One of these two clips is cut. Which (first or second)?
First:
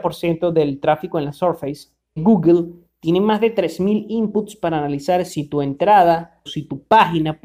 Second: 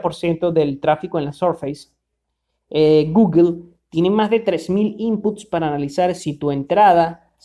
first